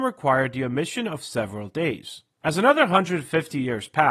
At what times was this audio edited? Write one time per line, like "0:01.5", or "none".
0:02.4